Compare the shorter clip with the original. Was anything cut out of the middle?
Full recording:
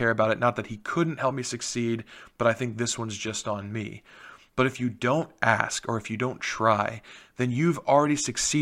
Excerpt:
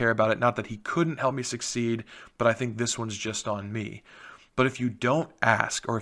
no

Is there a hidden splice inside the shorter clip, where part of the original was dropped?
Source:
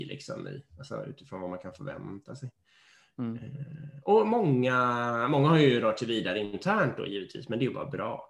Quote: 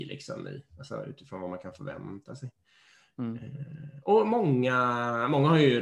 no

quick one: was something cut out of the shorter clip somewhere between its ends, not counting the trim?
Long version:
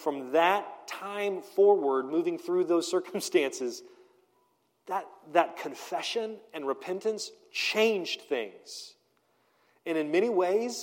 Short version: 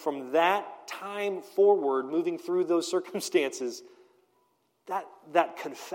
no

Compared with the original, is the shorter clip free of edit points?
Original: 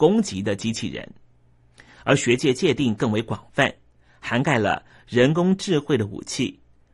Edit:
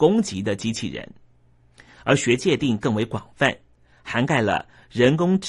no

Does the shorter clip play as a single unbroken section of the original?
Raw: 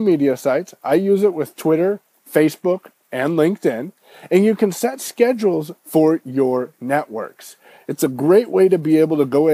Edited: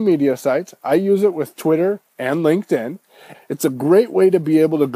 no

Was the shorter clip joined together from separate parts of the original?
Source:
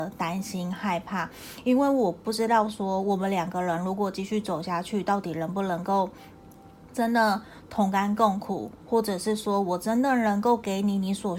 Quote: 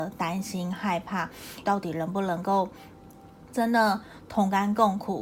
yes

